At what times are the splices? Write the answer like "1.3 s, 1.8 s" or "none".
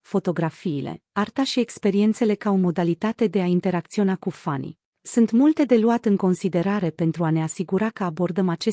4.9 s

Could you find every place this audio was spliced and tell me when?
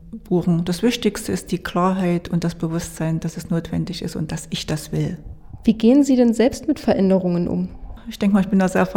8.0 s

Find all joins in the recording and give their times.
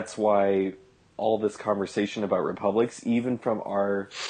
none

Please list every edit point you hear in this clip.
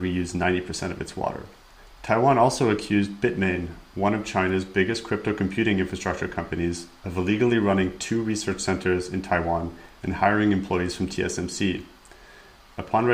none

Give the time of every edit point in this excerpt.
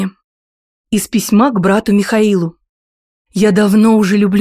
none

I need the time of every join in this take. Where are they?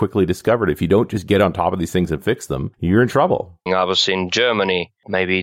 3.7 s

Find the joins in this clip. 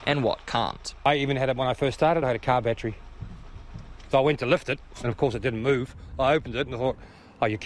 none

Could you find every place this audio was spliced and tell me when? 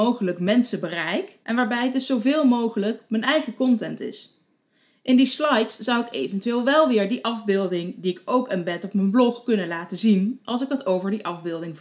1.4 s

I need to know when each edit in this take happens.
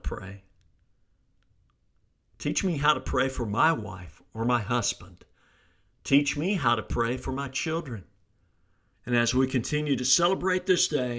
8.9 s

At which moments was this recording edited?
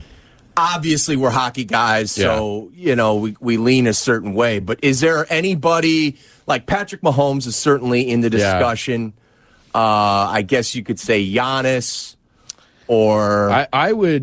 none

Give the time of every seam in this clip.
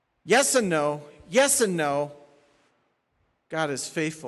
none

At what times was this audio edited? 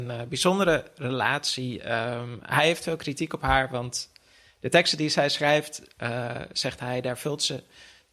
none

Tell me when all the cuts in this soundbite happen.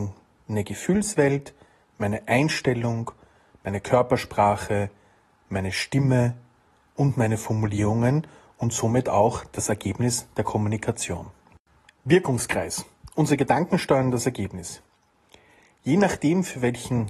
11.9 s

